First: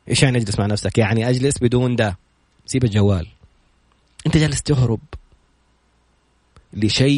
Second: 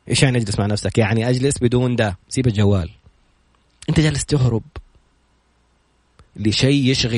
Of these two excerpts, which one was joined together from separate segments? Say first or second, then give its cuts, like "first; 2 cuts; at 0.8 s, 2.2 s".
second; 1 cut; at 2.2 s